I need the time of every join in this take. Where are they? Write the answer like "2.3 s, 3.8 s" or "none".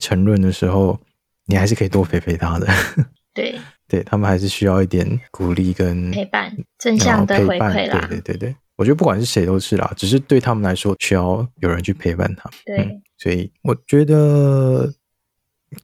11.0 s, 13.6 s